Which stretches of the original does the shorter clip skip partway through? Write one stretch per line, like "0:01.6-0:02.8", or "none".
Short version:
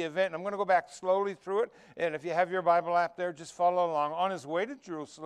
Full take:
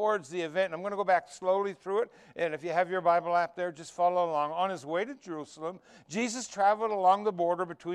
none